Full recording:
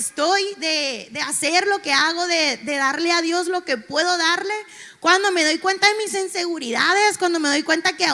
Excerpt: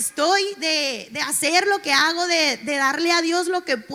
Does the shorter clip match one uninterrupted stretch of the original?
yes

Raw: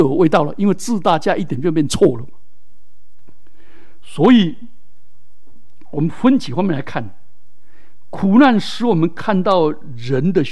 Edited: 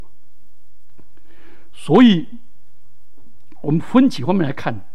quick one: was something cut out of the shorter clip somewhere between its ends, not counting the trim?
no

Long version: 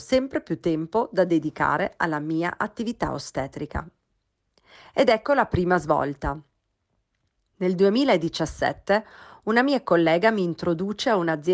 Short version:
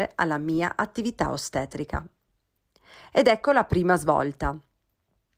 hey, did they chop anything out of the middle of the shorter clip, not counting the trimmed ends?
no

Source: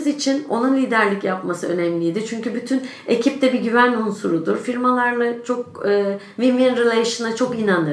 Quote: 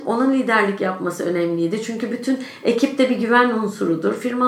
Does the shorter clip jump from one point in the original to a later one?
no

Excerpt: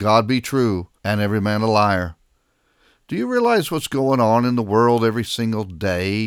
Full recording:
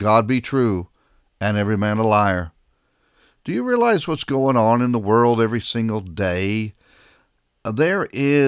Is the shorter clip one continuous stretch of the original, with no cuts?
no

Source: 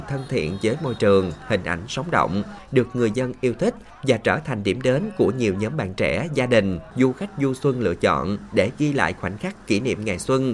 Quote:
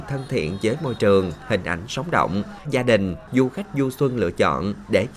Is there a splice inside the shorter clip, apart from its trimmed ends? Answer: yes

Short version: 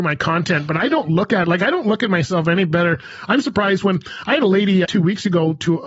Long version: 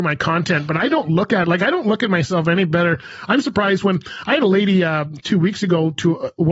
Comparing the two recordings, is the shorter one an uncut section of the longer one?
no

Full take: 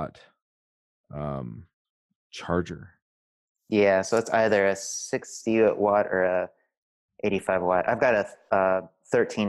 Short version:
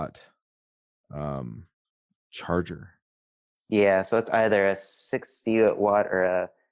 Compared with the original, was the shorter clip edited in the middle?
no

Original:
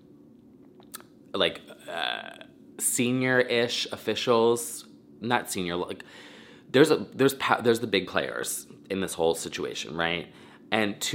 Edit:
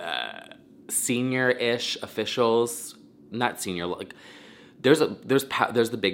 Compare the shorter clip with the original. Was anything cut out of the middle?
no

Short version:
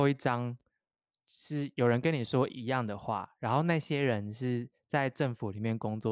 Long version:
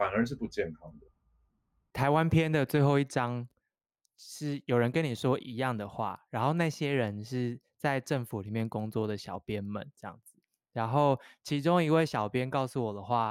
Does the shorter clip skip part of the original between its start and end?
no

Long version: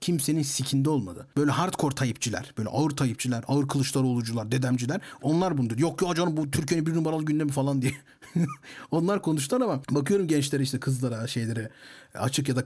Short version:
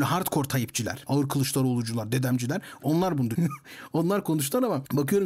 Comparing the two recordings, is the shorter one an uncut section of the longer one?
no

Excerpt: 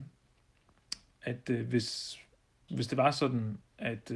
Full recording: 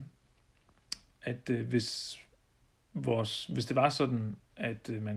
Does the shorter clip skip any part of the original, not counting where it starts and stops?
yes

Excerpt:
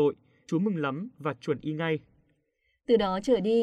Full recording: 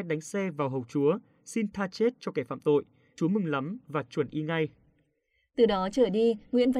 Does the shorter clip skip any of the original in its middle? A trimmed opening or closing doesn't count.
no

